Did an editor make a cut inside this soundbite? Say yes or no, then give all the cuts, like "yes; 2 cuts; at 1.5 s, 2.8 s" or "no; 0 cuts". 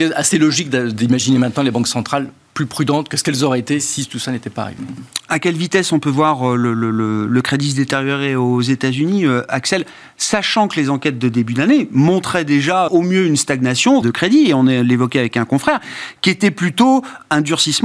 yes; 2 cuts; at 12.9 s, 14.0 s